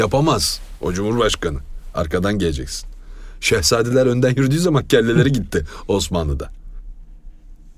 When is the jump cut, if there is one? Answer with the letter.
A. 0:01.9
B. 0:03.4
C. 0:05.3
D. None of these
D